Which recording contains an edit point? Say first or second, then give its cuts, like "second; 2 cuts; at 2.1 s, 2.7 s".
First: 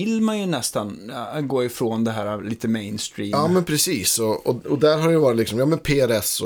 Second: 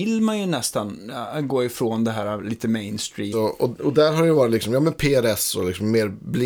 second; 1 cut; at 3.3 s